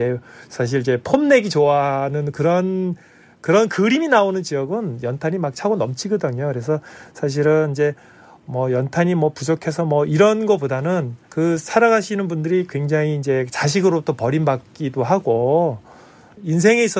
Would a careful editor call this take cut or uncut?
cut